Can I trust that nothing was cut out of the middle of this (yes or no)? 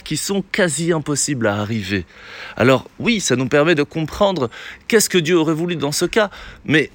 yes